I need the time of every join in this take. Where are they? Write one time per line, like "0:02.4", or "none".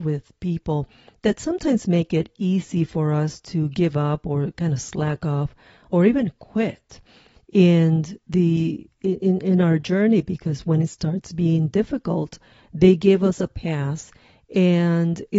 none

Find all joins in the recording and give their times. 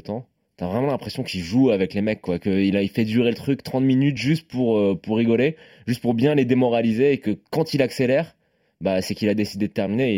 none

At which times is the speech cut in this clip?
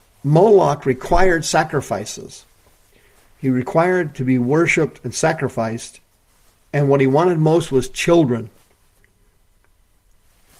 none

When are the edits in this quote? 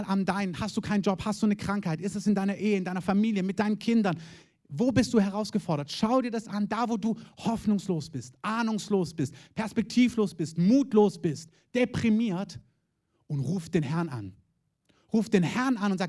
none

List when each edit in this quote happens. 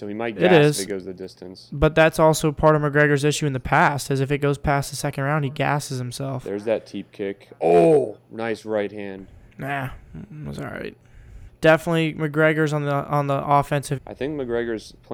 0:11.5
0:14.0

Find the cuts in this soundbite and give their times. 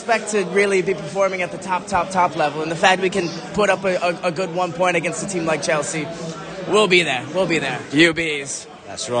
0:07.9

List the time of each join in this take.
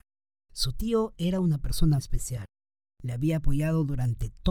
0:02.0

